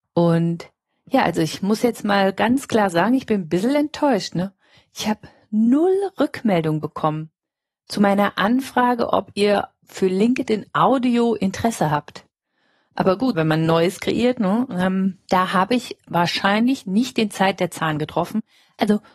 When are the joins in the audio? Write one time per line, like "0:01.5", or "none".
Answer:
0:13.3